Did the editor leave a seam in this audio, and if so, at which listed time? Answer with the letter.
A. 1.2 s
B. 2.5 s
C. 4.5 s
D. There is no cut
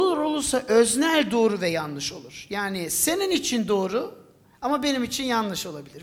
D